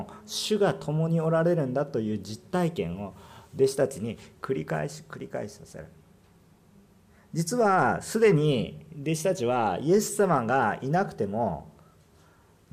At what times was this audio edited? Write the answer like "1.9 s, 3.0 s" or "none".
none